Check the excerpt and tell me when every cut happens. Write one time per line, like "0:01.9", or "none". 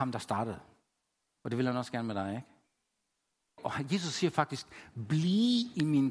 0:01.3
0:03.6